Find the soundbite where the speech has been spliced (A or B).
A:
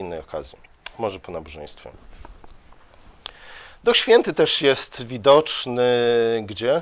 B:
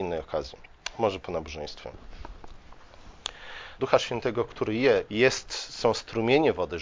B